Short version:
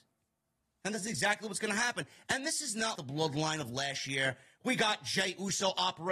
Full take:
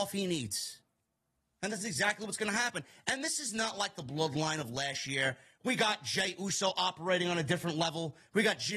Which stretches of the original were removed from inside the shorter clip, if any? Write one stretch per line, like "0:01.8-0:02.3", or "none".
0:03.7-0:03.9